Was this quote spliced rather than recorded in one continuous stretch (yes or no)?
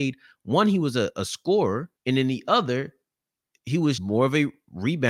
yes